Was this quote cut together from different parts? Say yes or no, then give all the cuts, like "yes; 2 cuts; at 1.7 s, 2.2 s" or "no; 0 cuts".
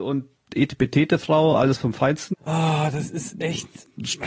yes; 1 cut; at 2.3 s